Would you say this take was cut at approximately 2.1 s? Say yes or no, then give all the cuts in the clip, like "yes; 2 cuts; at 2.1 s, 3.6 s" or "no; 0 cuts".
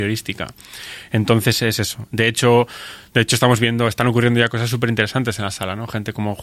no; 0 cuts